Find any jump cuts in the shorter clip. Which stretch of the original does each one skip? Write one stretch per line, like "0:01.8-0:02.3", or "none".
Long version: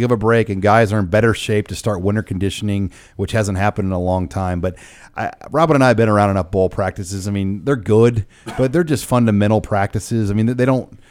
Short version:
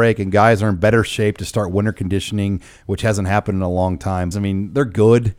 0:04.6-0:07.2